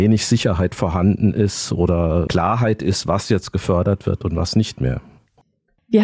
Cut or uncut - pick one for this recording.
uncut